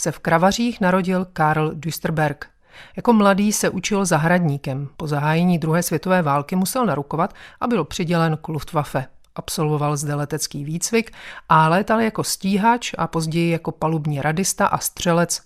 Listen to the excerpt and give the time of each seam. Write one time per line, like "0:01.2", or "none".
none